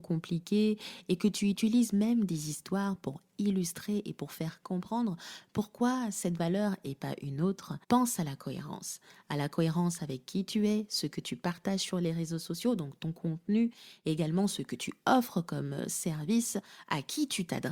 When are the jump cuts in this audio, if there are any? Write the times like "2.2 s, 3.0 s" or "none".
7.8 s